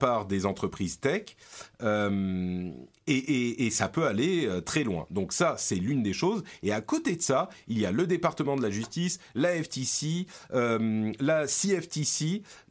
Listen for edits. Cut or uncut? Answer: uncut